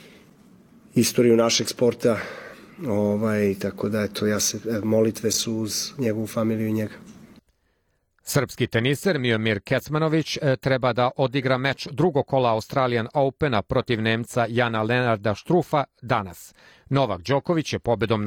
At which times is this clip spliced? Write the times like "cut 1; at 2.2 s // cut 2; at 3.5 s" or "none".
cut 1; at 16.7 s